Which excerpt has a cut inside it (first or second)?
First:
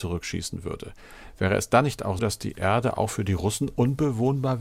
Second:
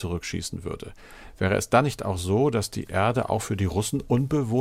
first